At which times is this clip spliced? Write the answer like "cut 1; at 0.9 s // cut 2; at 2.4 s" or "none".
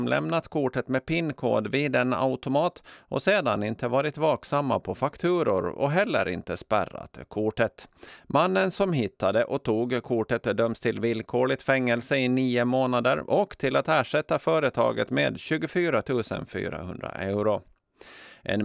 cut 1; at 8.2 s